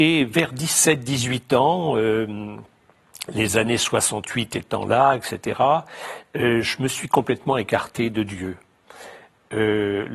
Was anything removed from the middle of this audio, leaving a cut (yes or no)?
no